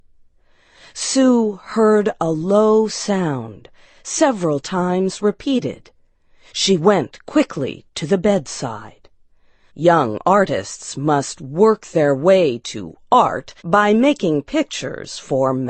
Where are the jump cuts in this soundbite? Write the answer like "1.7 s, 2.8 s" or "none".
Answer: 9.7 s, 13.6 s